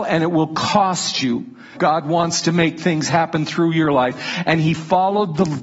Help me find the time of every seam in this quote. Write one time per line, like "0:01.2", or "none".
0:01.7